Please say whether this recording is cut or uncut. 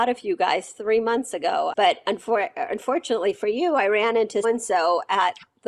cut